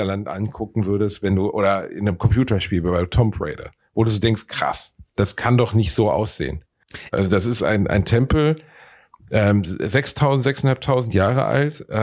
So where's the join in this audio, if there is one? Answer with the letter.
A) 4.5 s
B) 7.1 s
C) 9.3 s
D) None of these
B